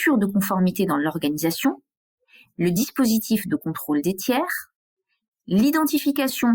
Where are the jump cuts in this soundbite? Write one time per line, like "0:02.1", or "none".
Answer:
none